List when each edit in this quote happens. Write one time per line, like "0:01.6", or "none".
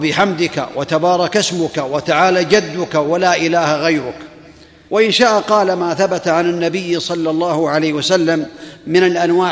none

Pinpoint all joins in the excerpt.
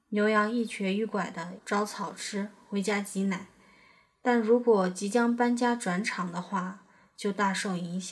0:01.6

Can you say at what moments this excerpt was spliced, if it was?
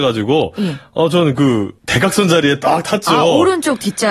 0:01.8

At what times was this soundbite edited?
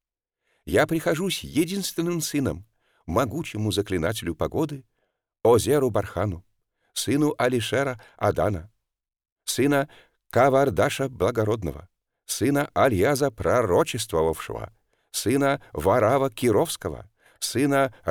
none

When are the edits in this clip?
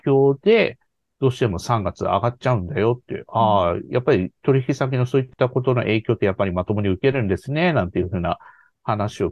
none

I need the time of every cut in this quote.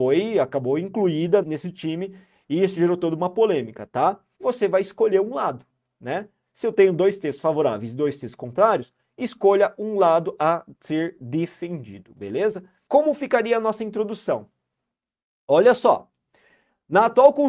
0:01.4
0:04.4

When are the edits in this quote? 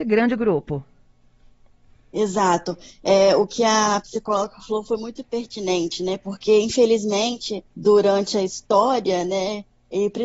0:07.7

